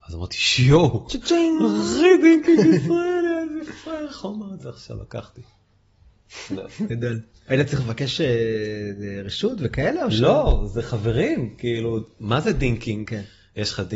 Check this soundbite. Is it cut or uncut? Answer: cut